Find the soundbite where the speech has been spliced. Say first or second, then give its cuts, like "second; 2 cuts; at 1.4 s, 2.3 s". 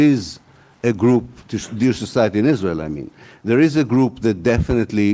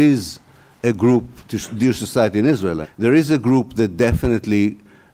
second; 1 cut; at 2.8 s